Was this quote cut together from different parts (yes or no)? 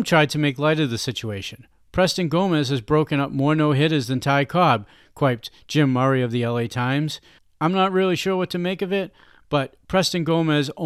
yes